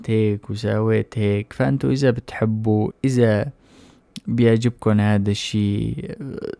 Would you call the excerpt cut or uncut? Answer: cut